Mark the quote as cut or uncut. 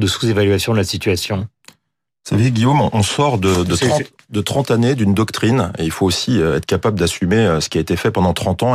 uncut